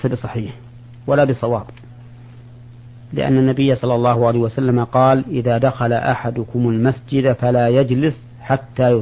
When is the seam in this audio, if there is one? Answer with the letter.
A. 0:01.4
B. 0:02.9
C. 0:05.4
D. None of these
D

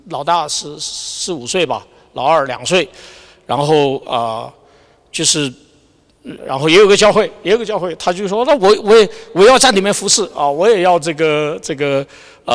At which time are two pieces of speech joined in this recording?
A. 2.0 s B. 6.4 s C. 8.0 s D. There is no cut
B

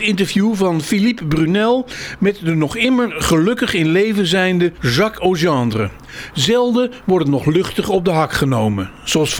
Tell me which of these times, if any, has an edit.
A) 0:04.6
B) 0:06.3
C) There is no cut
B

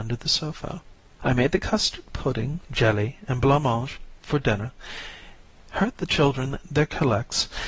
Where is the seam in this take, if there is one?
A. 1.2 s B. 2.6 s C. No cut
A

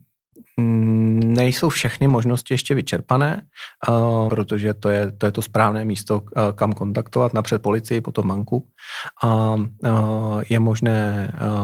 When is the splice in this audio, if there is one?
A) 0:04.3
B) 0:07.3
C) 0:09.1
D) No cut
A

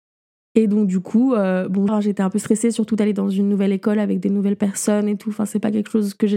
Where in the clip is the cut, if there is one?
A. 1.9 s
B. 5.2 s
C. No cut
A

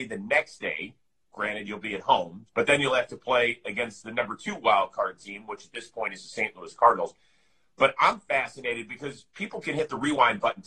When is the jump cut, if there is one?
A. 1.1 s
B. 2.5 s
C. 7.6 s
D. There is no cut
B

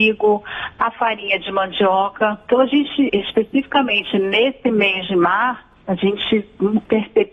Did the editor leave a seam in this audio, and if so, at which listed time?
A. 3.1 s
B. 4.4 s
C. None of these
A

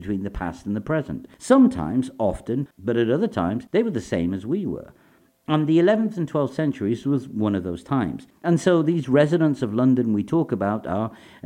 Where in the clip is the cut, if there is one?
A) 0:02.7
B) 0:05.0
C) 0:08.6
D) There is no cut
A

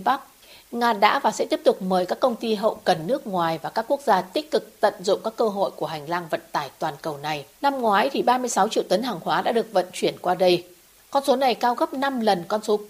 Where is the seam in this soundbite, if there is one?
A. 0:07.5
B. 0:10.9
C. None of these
A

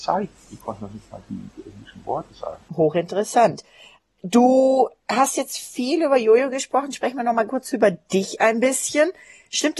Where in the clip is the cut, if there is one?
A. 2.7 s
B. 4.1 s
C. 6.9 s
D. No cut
A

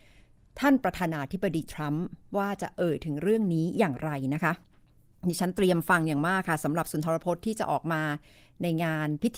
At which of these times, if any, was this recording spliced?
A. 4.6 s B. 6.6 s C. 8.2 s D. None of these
D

